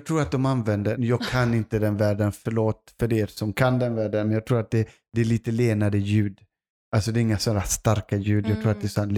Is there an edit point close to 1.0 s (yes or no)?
yes